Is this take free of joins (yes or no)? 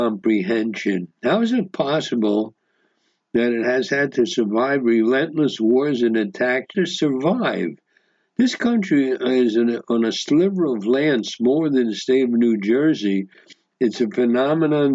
no